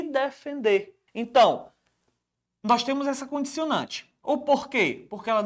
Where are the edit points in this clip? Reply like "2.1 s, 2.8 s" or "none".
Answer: 1.1 s